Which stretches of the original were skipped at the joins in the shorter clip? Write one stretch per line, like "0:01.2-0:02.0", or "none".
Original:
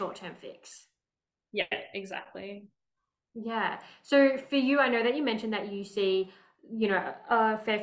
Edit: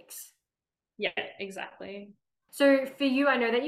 0:03.0-0:04.0

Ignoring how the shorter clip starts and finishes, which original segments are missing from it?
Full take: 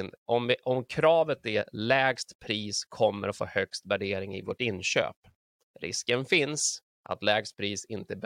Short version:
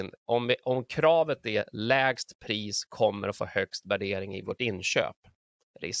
none

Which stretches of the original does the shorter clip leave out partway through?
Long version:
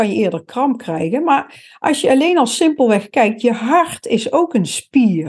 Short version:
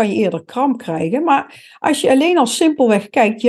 none

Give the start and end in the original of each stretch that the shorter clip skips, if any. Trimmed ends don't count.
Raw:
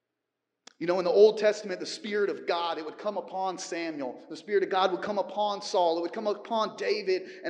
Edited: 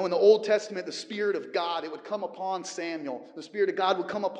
none

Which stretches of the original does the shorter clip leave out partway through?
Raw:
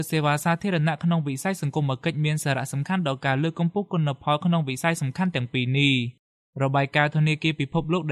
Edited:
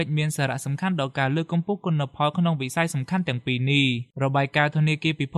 0:06.2-0:06.5

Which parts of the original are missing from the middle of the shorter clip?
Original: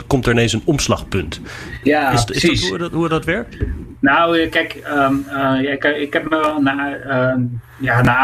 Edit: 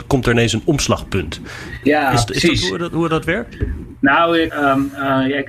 0:04.5-0:04.8

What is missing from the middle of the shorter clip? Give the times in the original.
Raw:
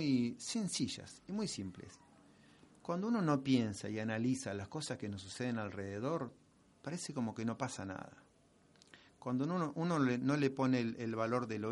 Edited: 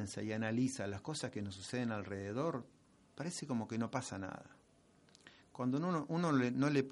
none

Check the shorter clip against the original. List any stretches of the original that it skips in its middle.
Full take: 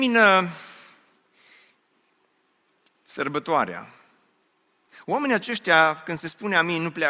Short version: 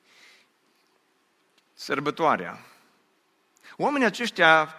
none

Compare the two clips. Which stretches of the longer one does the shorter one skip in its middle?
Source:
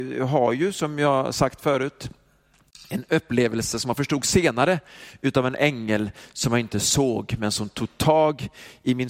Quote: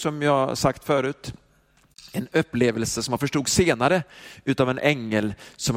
none

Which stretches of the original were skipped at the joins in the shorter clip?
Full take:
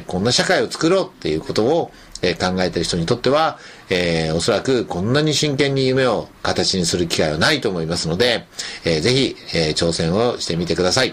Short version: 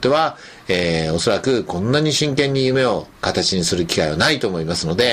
none

